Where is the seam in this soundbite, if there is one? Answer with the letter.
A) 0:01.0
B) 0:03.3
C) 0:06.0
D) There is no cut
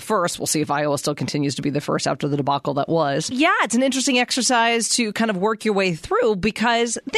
B